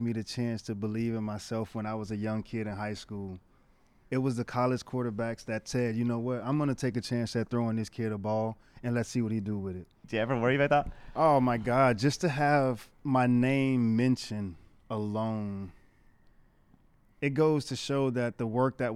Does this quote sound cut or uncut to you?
cut